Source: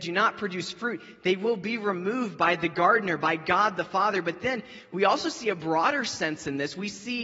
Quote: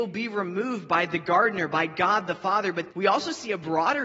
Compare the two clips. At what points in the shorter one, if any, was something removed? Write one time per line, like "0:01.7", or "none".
0:02.9